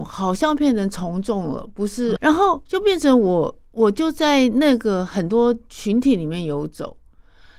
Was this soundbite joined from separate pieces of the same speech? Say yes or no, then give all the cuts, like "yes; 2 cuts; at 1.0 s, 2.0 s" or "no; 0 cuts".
yes; 1 cut; at 2.2 s